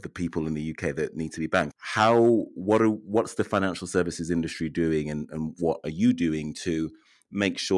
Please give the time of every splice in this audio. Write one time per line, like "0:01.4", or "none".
0:01.7